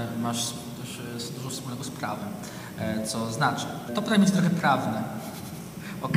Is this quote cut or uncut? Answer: cut